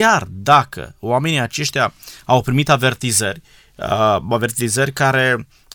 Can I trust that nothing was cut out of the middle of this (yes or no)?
yes